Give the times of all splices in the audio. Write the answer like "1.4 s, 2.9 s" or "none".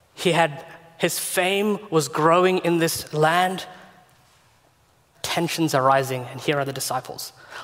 5.1 s